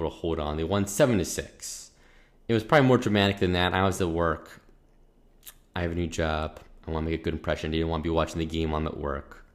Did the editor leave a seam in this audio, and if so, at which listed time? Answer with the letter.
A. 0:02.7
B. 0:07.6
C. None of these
C